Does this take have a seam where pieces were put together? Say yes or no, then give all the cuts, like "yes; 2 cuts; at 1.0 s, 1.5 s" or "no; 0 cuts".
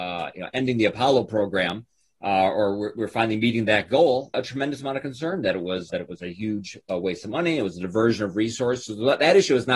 yes; 2 cuts; at 4.3 s, 5.9 s